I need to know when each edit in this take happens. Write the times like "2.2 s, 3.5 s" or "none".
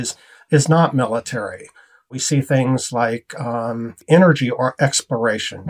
none